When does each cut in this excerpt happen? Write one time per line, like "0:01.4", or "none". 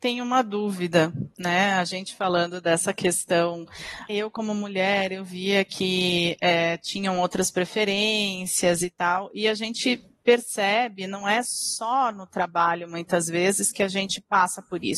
0:04.1